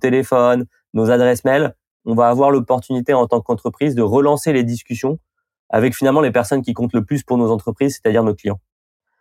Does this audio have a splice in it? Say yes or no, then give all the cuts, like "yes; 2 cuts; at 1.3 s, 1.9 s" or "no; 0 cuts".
no; 0 cuts